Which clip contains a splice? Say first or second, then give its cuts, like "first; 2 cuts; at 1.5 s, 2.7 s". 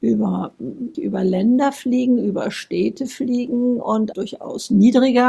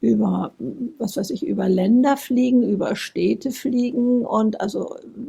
first; 2 cuts; at 0.9 s, 4.1 s